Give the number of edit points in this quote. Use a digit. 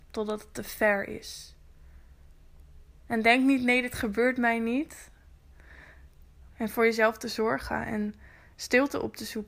1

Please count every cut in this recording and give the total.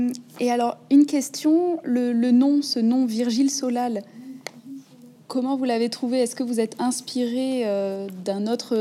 0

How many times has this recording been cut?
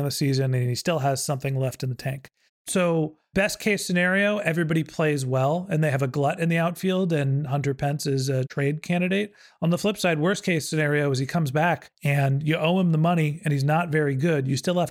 1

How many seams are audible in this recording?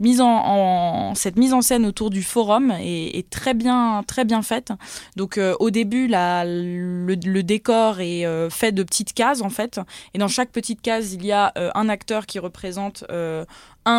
0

